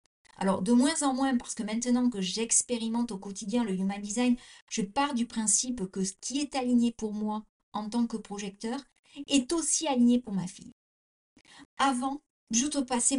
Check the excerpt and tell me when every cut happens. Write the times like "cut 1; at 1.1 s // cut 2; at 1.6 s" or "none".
cut 1; at 11.6 s